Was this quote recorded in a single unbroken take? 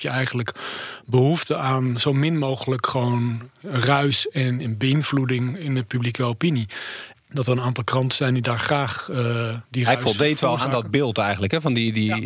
no; 2 cuts; at 7.1 s, 9.7 s

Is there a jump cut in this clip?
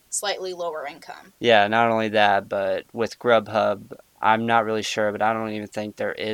yes; 3 cuts; at 1.3 s, 2.9 s, 4.0 s

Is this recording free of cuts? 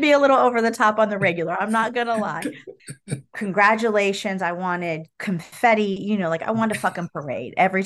no; 1 cut; at 2.8 s

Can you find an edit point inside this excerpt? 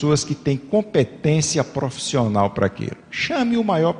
no; 0 cuts

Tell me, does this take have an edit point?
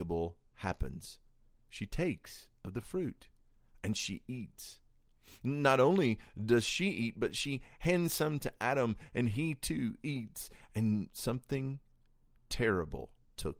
no; 0 cuts

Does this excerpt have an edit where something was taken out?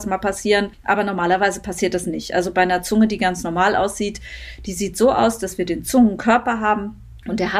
no; 0 cuts

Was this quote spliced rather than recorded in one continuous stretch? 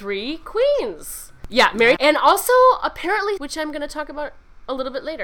yes; 2 cuts; at 2.0 s, 3.4 s

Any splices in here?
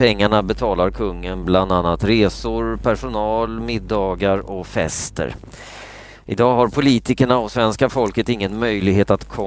no; 0 cuts

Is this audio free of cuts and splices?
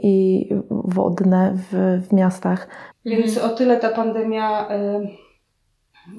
no; 1 cut; at 2.9 s

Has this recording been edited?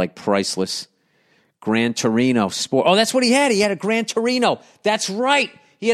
no; 0 cuts

